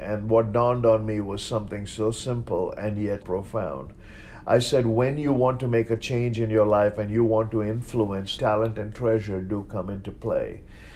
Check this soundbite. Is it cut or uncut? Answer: cut